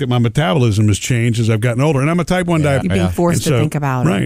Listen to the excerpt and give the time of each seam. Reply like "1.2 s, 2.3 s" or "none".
2.8 s